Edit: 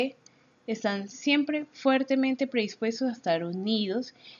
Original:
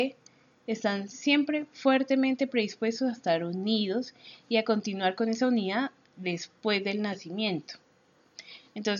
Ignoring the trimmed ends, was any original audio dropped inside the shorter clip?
no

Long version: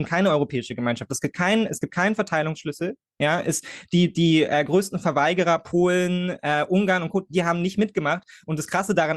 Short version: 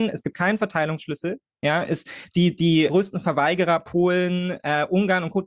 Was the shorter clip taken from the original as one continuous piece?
no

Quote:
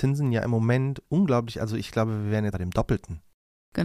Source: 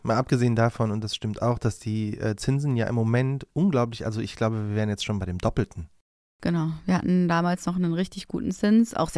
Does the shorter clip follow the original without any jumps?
no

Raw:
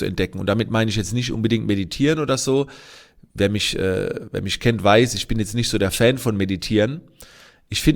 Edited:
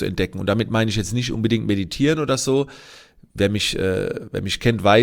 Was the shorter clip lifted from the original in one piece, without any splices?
yes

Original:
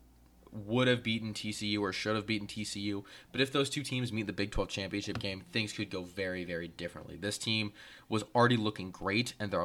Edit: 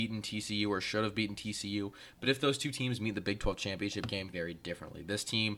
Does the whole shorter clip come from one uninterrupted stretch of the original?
no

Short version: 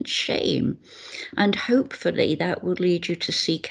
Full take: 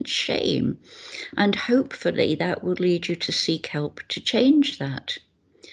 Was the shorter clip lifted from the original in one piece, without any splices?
yes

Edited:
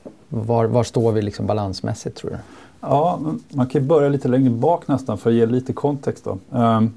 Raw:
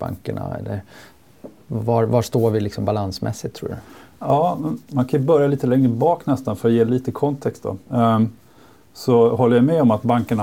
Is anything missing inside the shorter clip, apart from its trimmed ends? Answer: no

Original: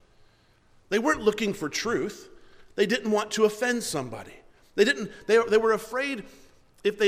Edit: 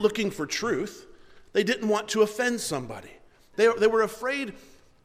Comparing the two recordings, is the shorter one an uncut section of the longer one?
no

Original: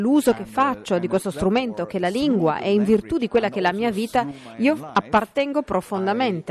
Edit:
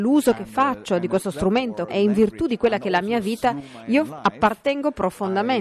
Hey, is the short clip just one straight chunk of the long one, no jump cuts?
no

